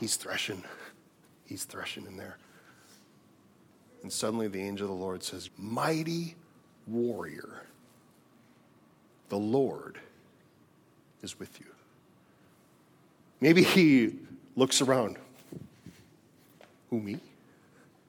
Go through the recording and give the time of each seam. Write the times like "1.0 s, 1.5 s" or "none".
5.5 s